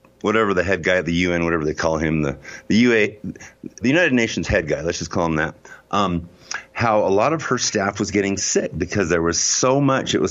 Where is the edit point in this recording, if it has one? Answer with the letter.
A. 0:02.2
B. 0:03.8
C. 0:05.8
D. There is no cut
B